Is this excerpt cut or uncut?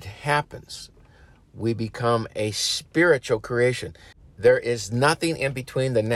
uncut